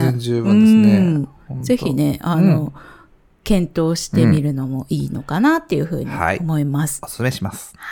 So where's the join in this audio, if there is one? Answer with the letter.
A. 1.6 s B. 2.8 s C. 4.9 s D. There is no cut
D